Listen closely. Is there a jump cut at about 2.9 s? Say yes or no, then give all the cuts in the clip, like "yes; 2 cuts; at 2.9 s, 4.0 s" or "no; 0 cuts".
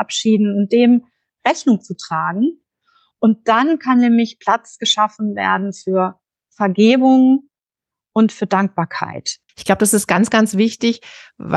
no; 1 cut; at 9.5 s